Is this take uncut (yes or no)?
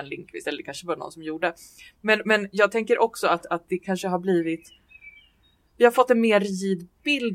yes